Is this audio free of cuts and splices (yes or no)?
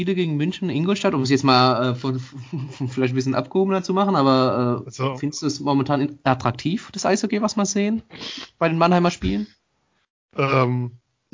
yes